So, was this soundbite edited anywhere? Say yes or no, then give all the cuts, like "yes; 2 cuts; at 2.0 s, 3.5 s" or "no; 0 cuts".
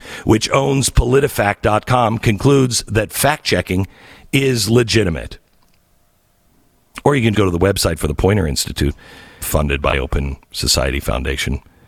yes; 2 cuts; at 7.3 s, 9.4 s